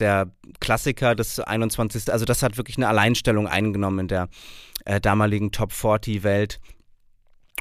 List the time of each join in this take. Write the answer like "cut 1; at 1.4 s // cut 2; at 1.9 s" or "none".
cut 1; at 2.1 s